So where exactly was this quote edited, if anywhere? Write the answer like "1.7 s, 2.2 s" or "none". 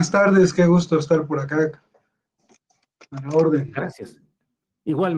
none